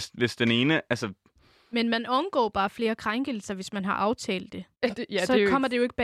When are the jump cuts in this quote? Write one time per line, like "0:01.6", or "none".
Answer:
0:04.7